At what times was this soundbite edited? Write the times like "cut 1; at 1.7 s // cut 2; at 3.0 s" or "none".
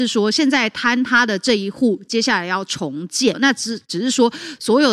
cut 1; at 3.3 s